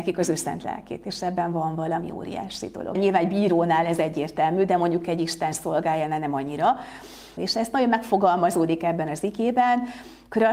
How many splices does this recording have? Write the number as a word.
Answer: two